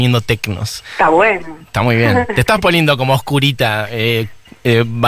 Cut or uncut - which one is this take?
uncut